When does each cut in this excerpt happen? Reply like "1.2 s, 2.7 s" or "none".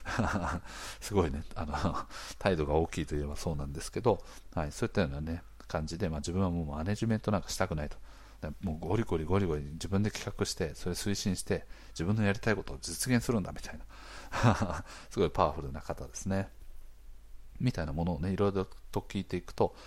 8.4 s